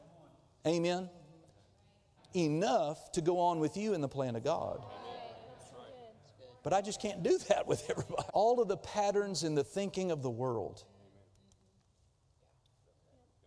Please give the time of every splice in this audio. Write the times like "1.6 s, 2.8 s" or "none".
2.2 s, 6.6 s, 8.3 s